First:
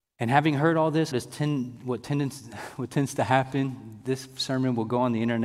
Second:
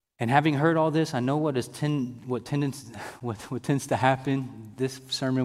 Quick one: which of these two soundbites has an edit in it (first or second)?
first